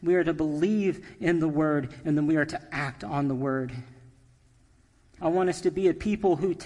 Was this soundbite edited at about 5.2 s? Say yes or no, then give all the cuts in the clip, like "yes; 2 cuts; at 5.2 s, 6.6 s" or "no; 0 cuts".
yes; 1 cut; at 5.2 s